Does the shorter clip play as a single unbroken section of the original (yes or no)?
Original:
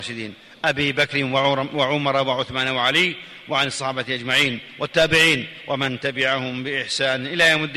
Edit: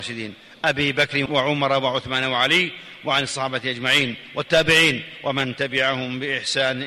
no